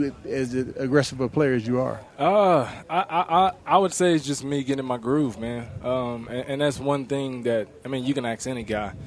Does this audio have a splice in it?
no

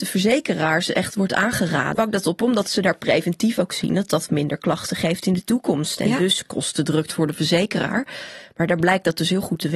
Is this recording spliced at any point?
yes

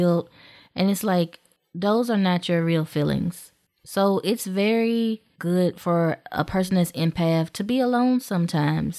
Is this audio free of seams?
no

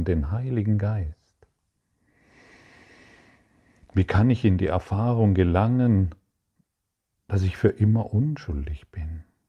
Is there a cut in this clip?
no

